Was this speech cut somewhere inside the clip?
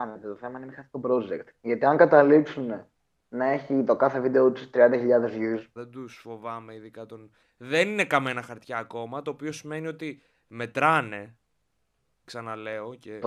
yes; 2 cuts; at 5.8 s, 7.4 s

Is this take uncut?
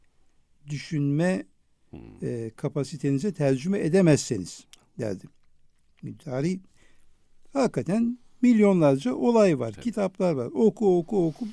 yes; 0 cuts

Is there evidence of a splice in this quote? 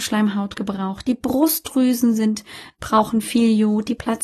yes; 1 cut; at 2.7 s

